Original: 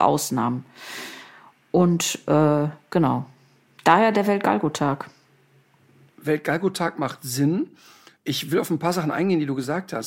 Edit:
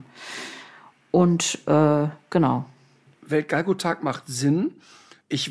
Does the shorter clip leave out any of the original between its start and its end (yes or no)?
yes